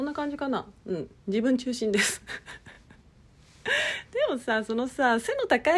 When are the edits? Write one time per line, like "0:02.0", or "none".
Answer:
none